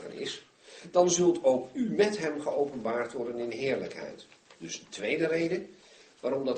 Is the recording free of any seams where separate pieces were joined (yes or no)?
yes